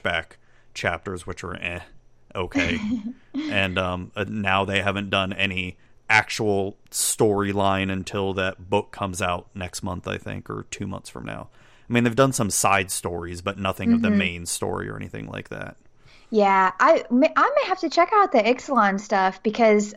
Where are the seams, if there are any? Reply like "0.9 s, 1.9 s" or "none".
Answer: none